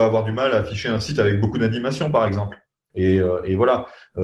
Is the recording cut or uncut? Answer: cut